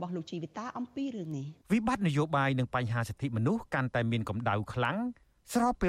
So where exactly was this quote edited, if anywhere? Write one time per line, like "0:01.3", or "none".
0:01.6